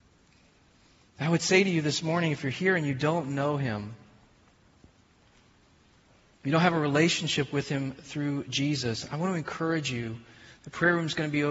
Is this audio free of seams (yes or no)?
yes